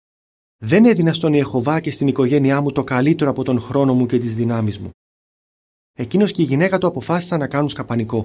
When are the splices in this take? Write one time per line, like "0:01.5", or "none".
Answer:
none